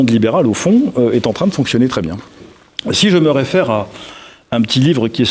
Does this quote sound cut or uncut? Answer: uncut